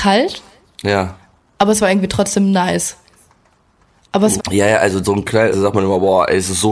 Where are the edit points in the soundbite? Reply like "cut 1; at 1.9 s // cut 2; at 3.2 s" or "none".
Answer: cut 1; at 4.4 s // cut 2; at 5.5 s